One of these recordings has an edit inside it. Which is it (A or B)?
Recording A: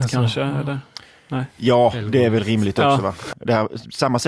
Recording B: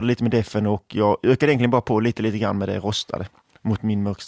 A